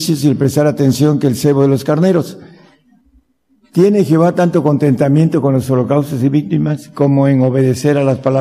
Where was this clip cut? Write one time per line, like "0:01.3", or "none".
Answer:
none